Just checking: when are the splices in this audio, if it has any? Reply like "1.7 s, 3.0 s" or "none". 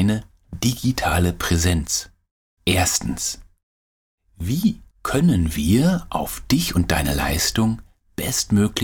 2.6 s, 4.9 s